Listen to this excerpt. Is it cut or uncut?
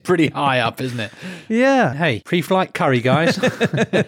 cut